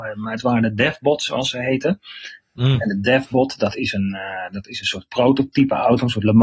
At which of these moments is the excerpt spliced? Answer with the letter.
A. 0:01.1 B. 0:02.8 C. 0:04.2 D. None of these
D